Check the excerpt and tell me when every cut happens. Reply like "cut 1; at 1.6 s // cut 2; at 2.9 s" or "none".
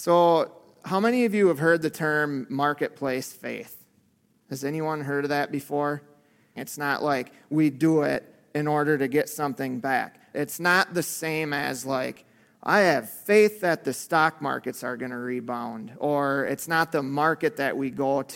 cut 1; at 6.6 s // cut 2; at 10.3 s